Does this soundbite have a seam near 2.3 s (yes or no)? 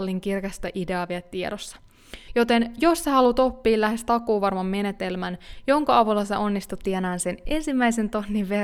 yes